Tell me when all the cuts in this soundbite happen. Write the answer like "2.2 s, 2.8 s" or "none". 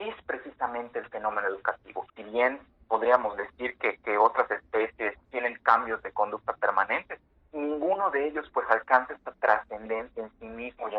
2.1 s, 5.2 s